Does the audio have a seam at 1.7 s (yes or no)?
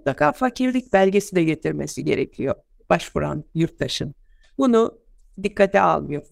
no